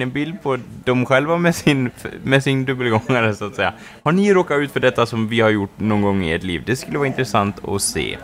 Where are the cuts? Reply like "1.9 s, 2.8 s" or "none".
none